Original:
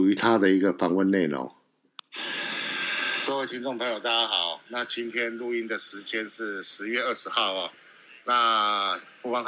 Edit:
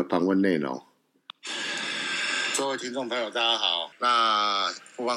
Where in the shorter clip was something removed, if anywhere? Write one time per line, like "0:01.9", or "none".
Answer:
0:03.9